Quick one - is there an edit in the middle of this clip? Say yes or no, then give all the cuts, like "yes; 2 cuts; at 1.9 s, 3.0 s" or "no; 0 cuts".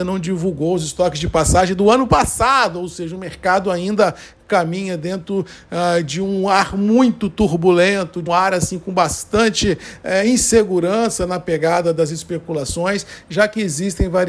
yes; 1 cut; at 8.3 s